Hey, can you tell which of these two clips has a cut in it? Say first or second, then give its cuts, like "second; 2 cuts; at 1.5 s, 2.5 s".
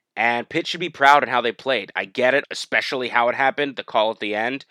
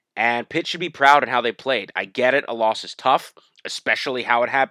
first; 1 cut; at 2.4 s